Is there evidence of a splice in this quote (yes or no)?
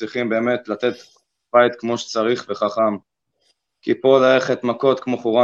no